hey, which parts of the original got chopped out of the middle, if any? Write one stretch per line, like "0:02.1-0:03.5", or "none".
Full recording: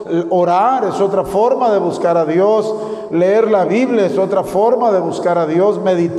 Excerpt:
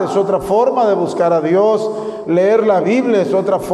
none